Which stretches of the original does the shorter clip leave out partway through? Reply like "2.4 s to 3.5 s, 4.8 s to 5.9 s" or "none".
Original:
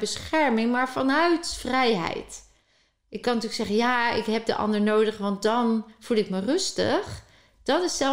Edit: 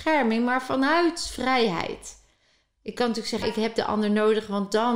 3.7 s to 4.1 s